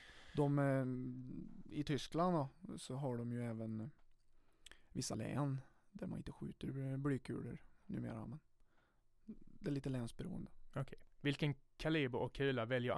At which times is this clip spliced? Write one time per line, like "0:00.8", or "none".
none